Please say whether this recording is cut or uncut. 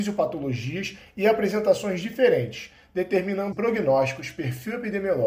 cut